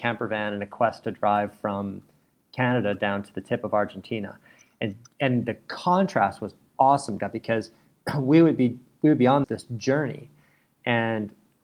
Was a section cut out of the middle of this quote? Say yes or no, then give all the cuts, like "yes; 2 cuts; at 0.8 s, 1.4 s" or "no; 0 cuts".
yes; 2 cuts; at 7.2 s, 9.4 s